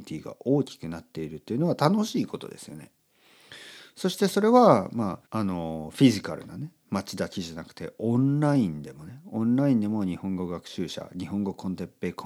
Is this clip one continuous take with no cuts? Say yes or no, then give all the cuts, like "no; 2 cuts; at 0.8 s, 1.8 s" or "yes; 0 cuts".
no; 1 cut; at 5.3 s